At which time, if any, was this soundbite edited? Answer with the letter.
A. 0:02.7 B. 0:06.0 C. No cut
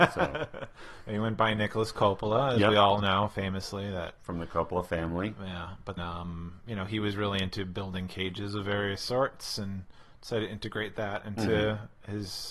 B